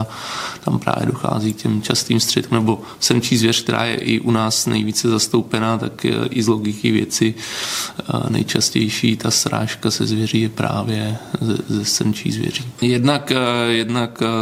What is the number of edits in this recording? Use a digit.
1